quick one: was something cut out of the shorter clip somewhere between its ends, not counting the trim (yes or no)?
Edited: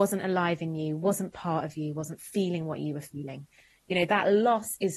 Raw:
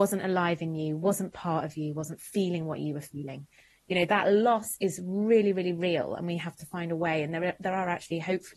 no